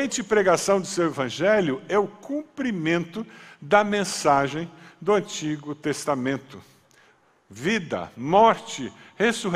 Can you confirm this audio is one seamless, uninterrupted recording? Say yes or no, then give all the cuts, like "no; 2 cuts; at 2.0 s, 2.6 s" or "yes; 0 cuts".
yes; 0 cuts